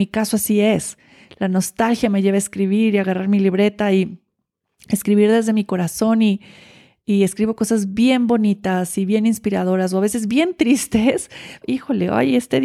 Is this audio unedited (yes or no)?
no